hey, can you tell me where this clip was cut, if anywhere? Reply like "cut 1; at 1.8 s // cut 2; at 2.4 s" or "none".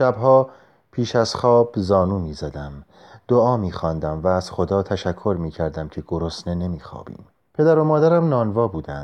cut 1; at 7.5 s